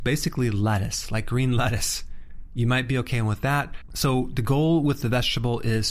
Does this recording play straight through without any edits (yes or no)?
no